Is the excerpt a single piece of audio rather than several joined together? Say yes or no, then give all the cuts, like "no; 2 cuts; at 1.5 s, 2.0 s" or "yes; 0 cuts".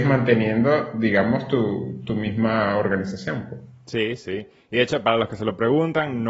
yes; 0 cuts